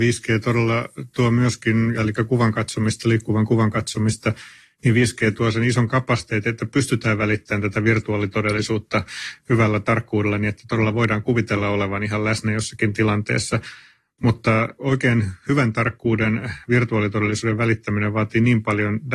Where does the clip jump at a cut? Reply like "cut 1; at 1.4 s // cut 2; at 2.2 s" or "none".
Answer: cut 1; at 1.9 s